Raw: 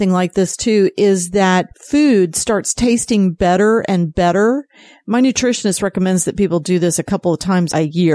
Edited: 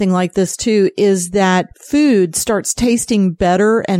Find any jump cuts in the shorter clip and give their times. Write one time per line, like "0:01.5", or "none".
none